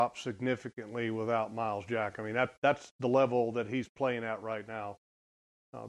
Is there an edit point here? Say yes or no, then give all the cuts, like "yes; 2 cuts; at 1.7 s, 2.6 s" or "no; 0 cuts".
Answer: no; 0 cuts